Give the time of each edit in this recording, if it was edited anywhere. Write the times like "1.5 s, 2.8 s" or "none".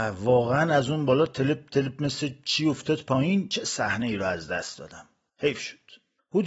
1.7 s